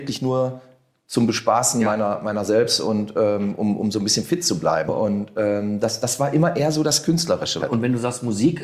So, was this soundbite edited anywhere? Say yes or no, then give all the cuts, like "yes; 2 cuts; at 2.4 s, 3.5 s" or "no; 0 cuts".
yes; 2 cuts; at 4.9 s, 7.6 s